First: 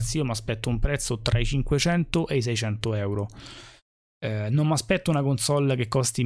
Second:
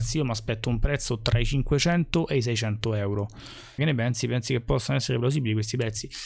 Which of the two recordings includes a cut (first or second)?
second